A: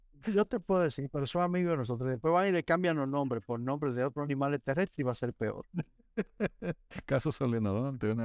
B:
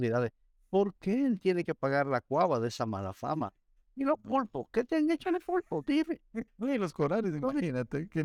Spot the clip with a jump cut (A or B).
B